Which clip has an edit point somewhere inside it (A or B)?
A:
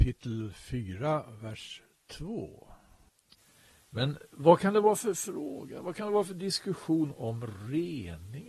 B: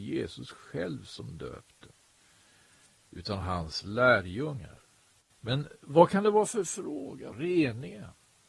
B